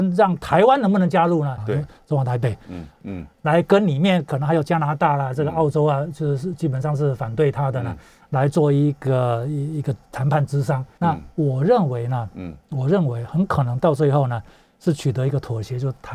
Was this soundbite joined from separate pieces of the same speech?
yes; 3 cuts; at 1.6 s, 3.0 s, 11.0 s

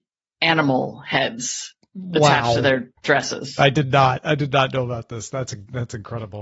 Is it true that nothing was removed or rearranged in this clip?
yes; 0 cuts

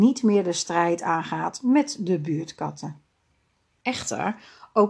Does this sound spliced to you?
yes; 1 cut; at 3.8 s

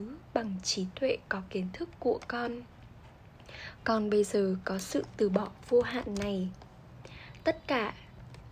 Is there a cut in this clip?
yes; 1 cut; at 3.8 s

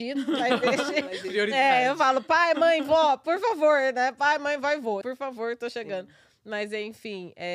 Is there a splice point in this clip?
yes; 1 cut; at 5.0 s

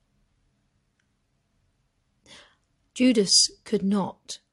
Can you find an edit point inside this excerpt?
no; 0 cuts

